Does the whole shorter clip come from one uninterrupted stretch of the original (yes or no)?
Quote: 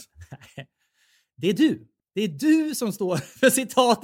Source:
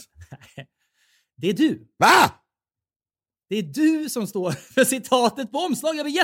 no